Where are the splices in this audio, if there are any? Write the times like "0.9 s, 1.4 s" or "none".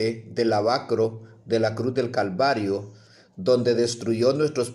none